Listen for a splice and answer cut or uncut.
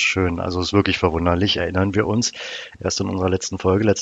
uncut